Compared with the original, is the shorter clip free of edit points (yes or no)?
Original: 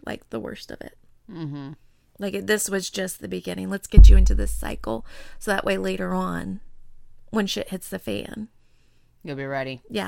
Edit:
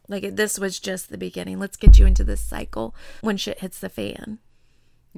no